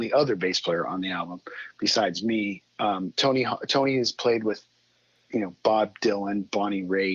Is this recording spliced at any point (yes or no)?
yes